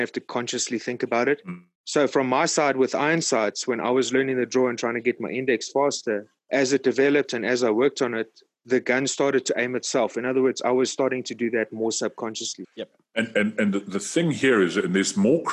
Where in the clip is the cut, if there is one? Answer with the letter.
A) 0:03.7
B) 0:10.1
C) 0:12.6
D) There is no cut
C